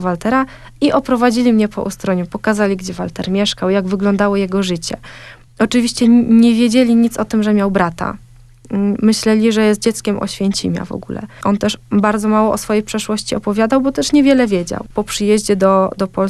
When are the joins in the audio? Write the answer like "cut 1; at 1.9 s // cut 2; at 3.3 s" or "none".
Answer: none